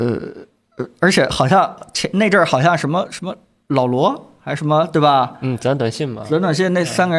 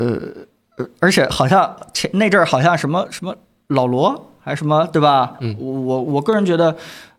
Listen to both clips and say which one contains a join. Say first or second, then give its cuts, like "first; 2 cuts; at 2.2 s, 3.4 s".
second; 1 cut; at 5.4 s